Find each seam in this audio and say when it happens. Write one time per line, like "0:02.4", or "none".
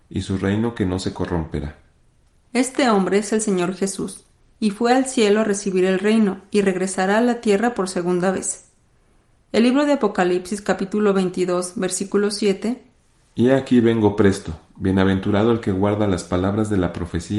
none